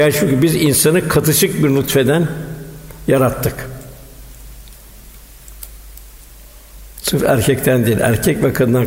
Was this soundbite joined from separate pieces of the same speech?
no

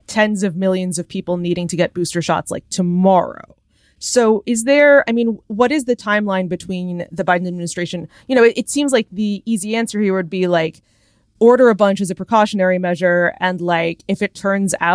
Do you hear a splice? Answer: no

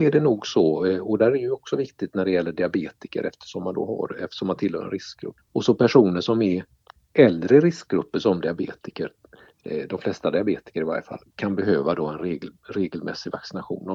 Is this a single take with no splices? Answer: no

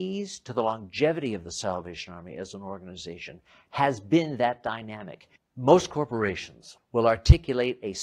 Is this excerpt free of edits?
no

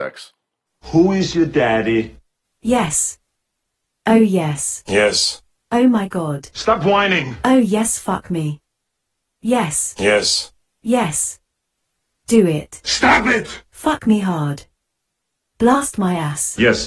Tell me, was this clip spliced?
no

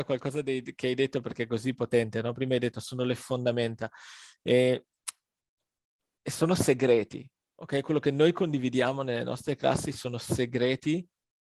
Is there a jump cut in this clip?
no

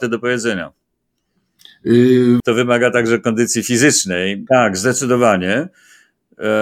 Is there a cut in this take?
yes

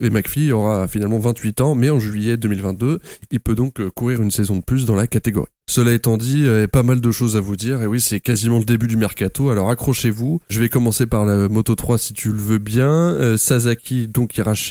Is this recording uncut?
no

